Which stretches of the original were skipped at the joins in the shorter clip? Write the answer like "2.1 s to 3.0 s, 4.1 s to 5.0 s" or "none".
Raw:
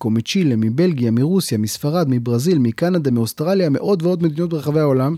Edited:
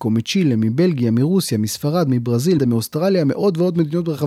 2.6 s to 3.0 s